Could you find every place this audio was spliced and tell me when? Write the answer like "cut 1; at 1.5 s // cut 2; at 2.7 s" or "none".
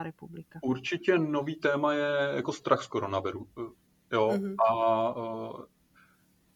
none